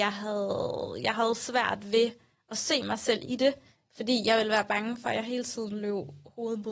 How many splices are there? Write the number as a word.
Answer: zero